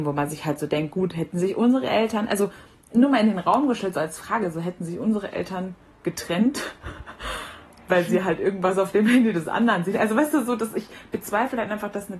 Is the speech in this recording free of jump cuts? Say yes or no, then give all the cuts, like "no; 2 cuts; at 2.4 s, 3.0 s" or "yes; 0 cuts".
yes; 0 cuts